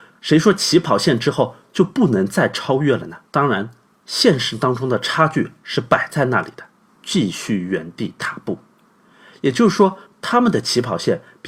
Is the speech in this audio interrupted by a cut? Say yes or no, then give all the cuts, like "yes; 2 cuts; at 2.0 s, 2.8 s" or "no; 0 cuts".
yes; 2 cuts; at 3.3 s, 6.9 s